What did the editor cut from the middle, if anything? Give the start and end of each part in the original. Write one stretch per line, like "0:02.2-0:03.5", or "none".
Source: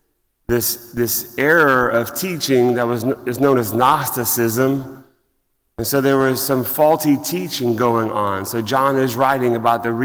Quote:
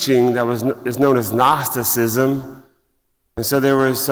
none